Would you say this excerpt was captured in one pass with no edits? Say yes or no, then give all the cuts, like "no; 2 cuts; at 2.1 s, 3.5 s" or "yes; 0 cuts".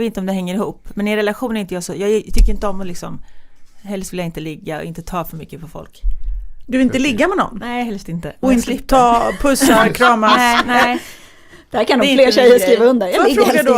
yes; 0 cuts